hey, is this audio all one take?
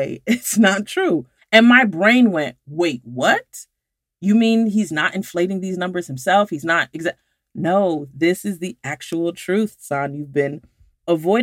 no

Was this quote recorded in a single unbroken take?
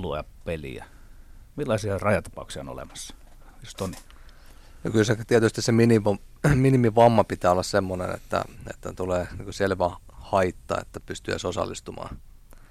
yes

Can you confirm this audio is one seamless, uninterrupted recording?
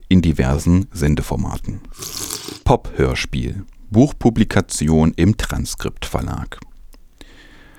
yes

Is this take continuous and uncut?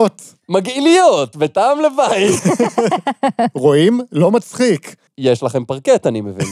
no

